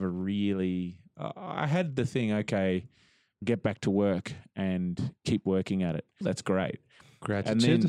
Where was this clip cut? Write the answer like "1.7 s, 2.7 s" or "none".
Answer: 3.4 s, 6.2 s